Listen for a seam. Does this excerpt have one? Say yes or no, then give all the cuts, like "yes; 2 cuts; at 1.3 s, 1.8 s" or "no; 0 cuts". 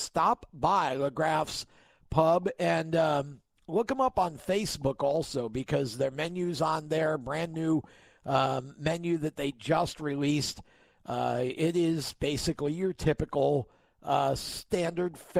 no; 0 cuts